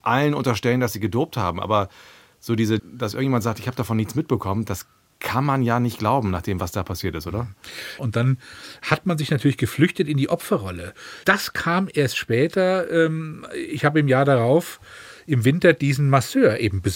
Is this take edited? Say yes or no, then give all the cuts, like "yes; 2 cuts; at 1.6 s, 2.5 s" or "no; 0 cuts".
yes; 3 cuts; at 2.8 s, 8.0 s, 11.2 s